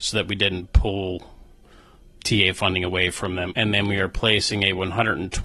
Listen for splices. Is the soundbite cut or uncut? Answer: cut